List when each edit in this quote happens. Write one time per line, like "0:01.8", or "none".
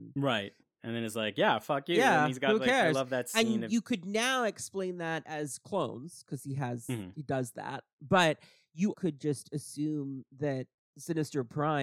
0:08.9